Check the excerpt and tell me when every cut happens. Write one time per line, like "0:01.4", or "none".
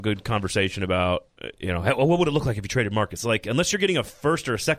0:03.2

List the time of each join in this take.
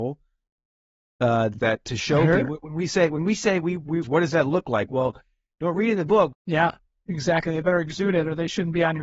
0:01.6
0:04.0
0:06.3

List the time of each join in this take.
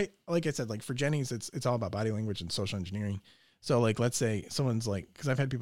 none

